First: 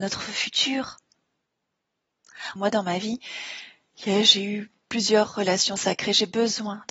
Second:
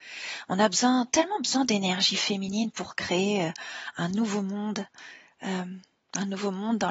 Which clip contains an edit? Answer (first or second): first